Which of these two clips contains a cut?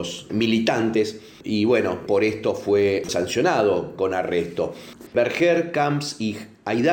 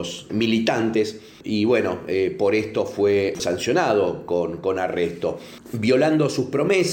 first; 3 cuts; at 2.1 s, 4.0 s, 5.1 s

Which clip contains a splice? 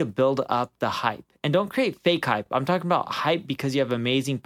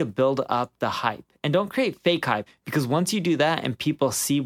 second; 1 cut; at 2.5 s

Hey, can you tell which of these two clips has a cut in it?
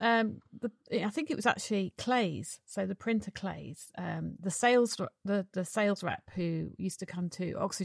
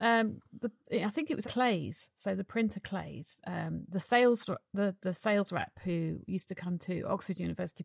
second; 1 cut; at 1.4 s

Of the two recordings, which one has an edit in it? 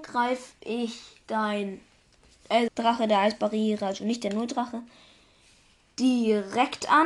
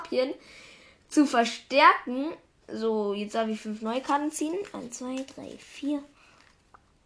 first; 1 cut; at 2.7 s

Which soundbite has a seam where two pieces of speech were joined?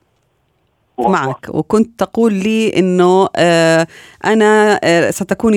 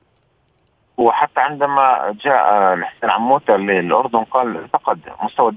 first; 1 cut; at 1.0 s

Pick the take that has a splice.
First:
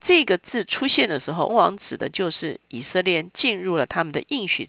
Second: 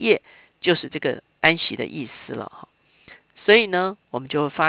first; 1 cut; at 1.5 s

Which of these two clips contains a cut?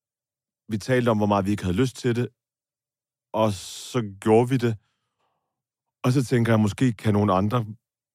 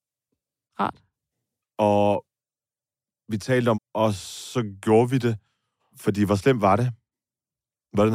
second; 3 cuts; at 1.6 s, 3.7 s, 5.9 s

